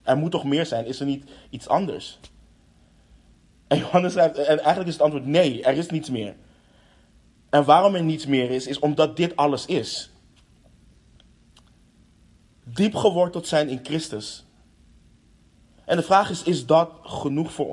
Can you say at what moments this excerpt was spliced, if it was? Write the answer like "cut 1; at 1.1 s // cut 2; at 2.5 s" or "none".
cut 1; at 15.8 s